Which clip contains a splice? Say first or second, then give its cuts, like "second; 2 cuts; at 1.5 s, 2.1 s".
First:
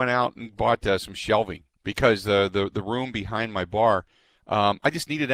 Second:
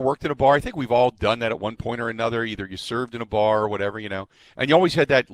first; 1 cut; at 1.7 s